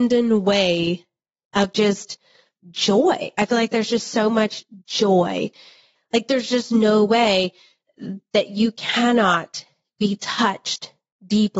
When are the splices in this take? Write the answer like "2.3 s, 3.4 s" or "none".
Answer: 6.0 s